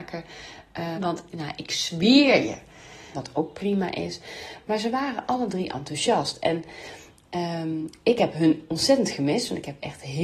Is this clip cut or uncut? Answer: cut